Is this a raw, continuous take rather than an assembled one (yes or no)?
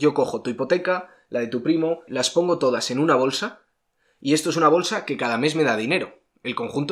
no